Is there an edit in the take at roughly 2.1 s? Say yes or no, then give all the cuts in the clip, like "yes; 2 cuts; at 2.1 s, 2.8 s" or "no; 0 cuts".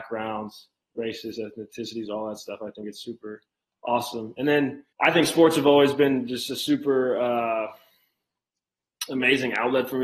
no; 1 cut; at 4.9 s